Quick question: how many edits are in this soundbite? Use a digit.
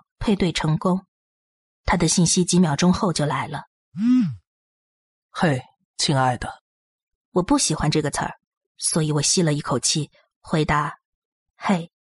2